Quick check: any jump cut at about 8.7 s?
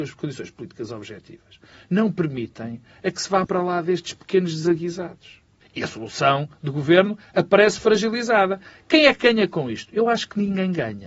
no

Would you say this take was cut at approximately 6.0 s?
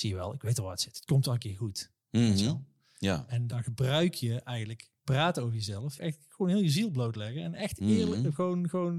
yes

